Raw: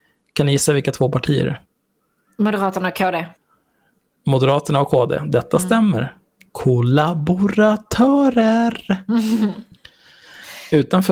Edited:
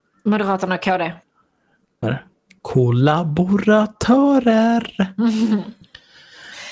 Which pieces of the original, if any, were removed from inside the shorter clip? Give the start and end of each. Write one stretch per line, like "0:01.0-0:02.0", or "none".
0:04.2-0:05.9